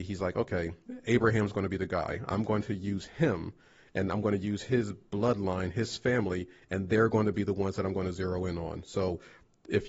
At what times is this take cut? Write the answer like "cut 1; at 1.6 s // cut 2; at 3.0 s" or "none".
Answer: none